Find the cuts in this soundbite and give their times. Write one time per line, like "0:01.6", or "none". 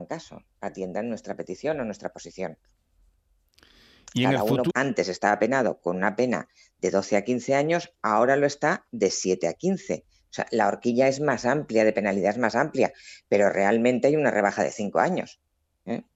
0:04.7